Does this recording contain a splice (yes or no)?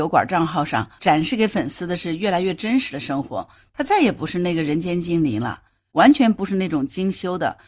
yes